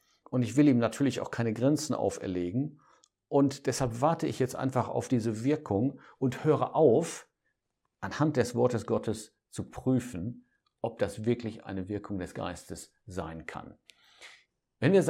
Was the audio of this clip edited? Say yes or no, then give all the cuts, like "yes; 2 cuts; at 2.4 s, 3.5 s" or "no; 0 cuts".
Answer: no; 0 cuts